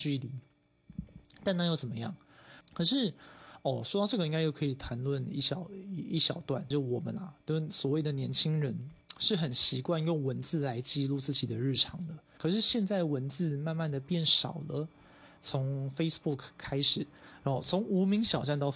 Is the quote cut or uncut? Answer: cut